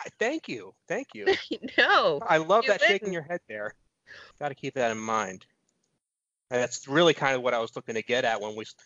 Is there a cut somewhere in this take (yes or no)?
yes